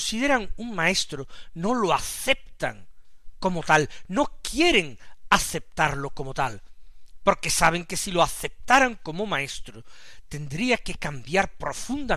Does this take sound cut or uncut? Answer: uncut